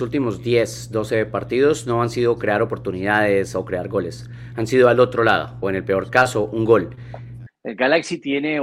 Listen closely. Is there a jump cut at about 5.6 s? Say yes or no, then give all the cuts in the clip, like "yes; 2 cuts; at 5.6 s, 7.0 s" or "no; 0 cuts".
yes; 2 cuts; at 5.6 s, 7.5 s